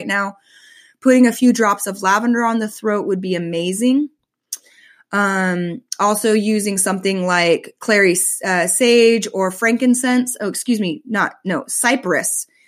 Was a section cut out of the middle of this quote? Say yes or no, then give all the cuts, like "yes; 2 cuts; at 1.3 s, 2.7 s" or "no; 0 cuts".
no; 0 cuts